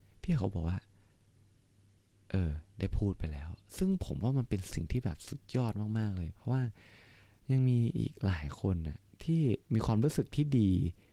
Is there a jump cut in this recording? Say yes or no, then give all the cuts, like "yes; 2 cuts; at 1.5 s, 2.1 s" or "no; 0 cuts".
no; 0 cuts